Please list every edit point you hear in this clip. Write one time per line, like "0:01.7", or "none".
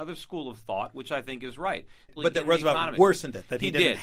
0:02.2